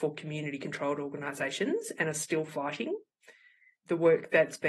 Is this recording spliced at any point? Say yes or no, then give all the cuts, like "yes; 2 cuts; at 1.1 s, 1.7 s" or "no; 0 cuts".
no; 0 cuts